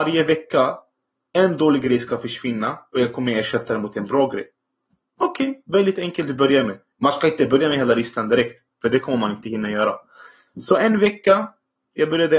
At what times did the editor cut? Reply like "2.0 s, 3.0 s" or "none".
none